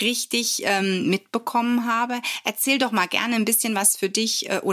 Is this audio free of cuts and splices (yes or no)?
yes